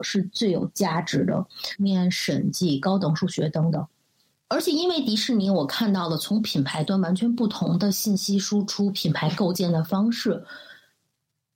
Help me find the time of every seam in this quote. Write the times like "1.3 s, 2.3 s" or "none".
1.8 s, 4.3 s